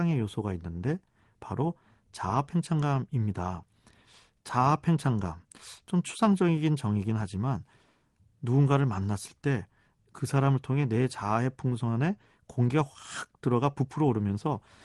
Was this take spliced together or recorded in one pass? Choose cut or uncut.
uncut